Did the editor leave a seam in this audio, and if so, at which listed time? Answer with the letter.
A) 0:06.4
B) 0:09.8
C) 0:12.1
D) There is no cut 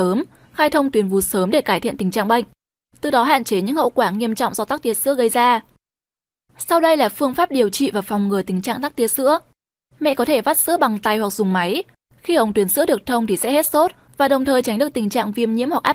B